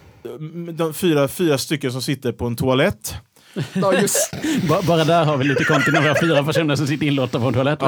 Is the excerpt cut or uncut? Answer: uncut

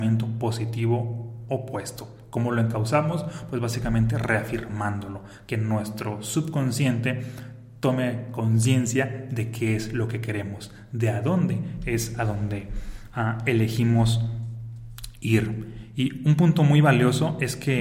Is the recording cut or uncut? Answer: uncut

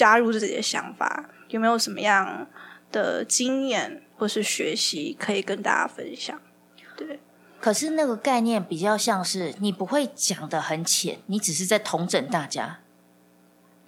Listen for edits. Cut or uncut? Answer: uncut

